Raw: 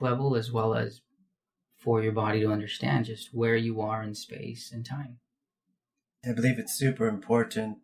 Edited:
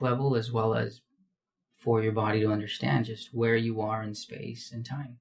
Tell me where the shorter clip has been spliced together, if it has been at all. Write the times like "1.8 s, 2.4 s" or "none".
none